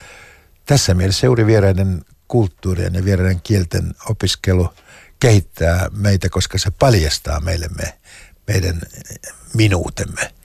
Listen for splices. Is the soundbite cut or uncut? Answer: uncut